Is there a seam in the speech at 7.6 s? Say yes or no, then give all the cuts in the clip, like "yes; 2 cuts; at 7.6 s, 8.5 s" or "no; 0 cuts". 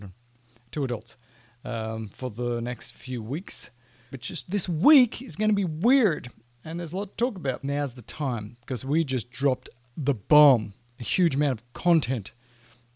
yes; 2 cuts; at 4.1 s, 7.6 s